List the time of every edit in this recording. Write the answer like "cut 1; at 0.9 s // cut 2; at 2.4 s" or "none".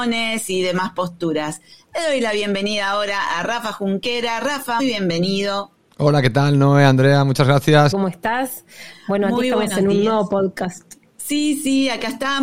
cut 1; at 4.8 s // cut 2; at 7.9 s